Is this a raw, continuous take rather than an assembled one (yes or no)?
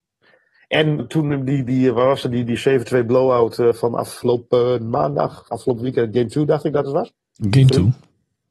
no